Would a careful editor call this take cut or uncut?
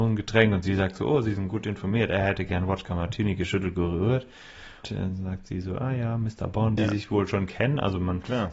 cut